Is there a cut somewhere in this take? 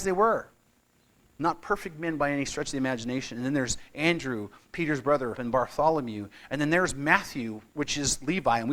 yes; 1 cut; at 5.4 s

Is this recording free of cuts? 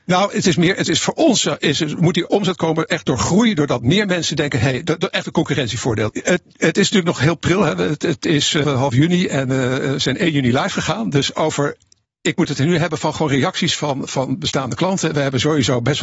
no; 2 cuts; at 6.1 s, 8.6 s

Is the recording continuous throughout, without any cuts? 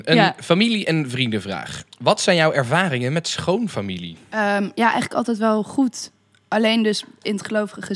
yes; 0 cuts

